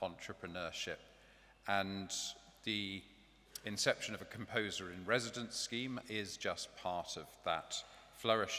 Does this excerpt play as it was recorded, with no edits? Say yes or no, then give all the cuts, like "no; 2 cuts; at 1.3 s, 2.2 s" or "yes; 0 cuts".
yes; 0 cuts